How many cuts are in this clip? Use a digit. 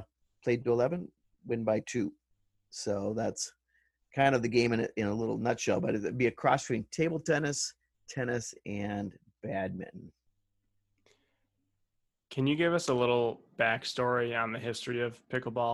0